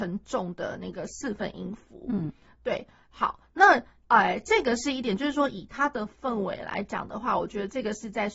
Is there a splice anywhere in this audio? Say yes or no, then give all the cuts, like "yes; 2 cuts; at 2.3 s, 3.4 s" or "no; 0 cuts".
no; 0 cuts